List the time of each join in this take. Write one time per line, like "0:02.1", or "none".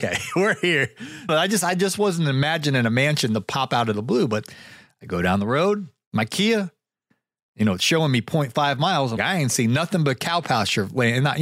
0:01.3
0:09.2